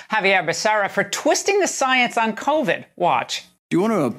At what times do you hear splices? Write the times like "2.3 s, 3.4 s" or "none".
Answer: none